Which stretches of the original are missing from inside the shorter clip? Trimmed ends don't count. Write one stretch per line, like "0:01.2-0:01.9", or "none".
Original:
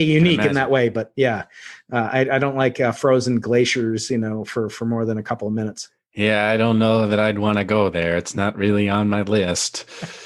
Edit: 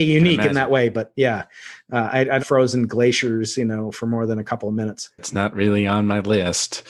0:02.4-0:02.9
0:04.4-0:04.7
0:06.0-0:08.2